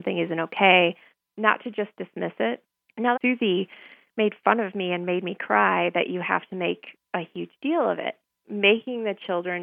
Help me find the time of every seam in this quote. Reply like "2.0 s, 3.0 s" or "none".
3.1 s, 8.4 s